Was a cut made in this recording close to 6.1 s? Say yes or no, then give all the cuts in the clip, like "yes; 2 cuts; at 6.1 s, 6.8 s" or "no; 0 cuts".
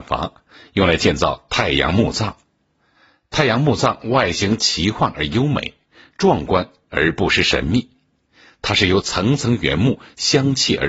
no; 0 cuts